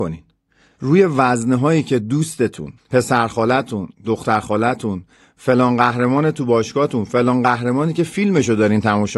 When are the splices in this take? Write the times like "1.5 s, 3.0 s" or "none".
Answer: 2.8 s